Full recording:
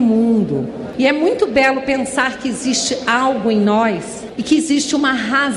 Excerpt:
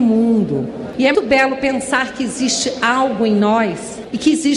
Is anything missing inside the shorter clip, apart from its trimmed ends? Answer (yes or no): yes